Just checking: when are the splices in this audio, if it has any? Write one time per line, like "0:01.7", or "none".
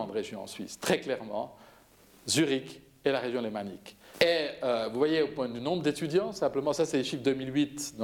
0:04.1